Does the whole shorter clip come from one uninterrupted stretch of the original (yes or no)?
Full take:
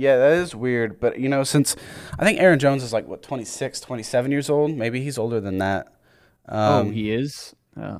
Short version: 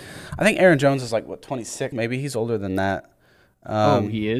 no